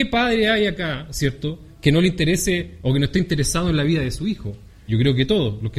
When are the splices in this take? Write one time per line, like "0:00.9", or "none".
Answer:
0:04.9